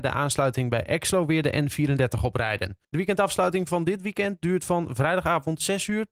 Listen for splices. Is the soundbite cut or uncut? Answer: cut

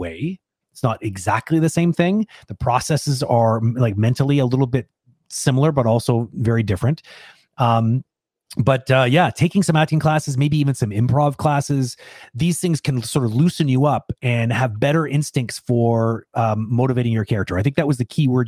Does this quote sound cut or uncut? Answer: uncut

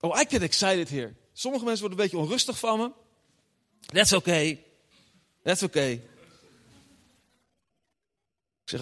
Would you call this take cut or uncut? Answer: uncut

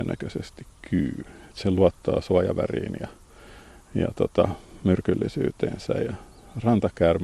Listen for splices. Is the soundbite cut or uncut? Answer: uncut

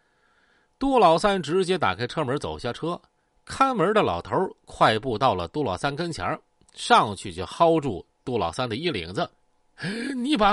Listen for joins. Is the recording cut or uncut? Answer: cut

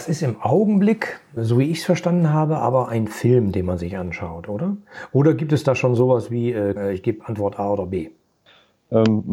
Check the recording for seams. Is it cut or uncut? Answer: cut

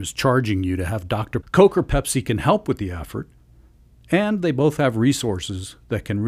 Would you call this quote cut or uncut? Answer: cut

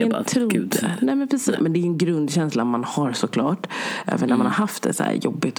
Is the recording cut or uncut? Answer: cut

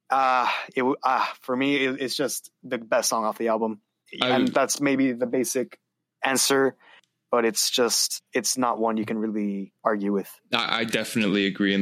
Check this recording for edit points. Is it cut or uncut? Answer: uncut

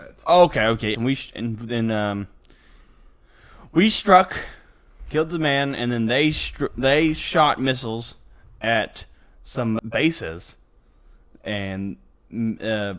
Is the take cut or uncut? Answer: cut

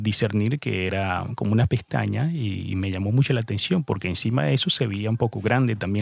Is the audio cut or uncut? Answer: uncut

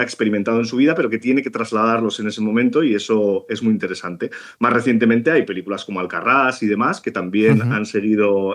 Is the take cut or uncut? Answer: uncut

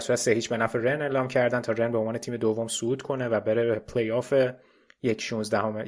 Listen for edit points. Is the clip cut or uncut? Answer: uncut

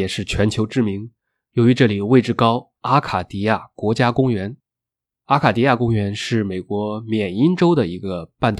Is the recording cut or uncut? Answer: cut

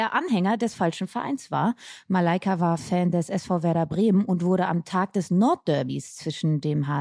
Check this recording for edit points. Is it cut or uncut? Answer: uncut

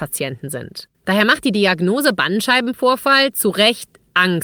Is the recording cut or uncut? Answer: cut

